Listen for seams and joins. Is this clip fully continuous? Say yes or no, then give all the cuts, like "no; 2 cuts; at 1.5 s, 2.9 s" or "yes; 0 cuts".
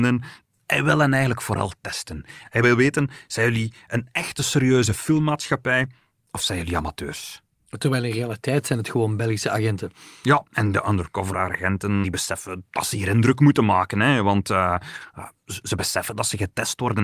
no; 1 cut; at 12.0 s